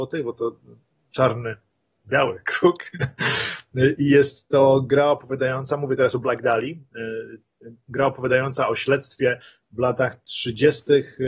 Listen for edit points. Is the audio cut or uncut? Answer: uncut